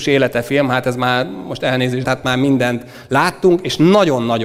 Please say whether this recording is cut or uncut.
cut